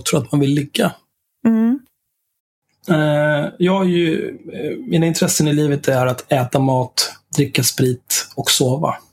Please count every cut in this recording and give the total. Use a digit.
0